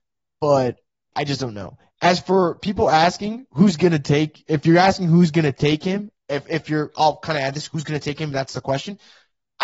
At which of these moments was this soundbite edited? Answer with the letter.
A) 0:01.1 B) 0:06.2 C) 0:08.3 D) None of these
A